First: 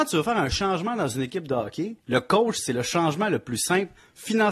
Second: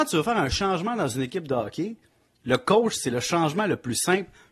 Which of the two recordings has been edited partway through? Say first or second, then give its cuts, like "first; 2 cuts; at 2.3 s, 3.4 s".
first; 1 cut; at 2.0 s